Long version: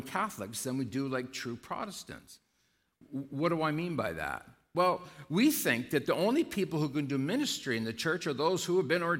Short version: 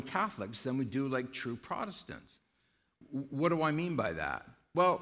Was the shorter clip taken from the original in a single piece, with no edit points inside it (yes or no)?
yes